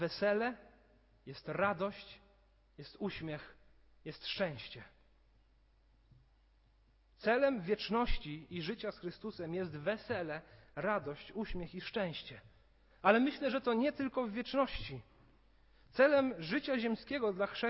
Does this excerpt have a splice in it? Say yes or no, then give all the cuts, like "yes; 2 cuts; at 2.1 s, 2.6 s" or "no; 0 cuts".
no; 0 cuts